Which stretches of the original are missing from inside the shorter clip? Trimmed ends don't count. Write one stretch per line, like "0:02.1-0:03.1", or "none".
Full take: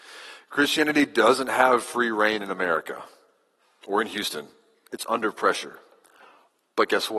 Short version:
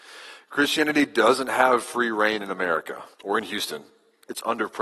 0:03.1-0:03.8